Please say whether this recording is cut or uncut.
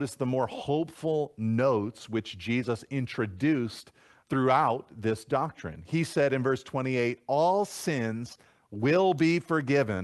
cut